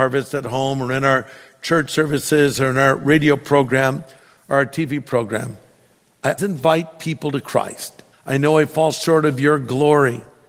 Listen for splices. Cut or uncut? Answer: cut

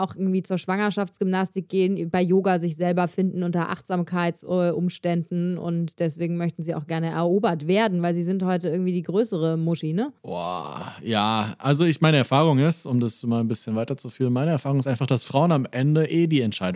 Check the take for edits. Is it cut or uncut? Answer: cut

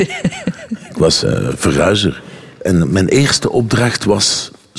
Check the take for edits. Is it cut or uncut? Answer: uncut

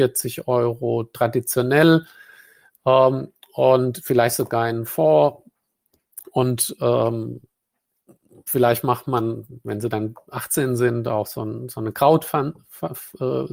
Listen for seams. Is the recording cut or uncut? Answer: uncut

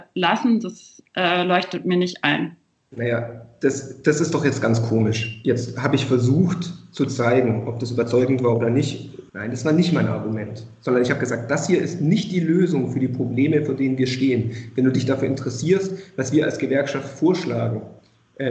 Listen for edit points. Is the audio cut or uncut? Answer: cut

